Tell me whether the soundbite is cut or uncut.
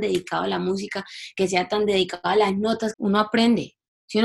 cut